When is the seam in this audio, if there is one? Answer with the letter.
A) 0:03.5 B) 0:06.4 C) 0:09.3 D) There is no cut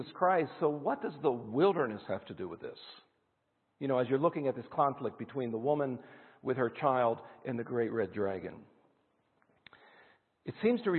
D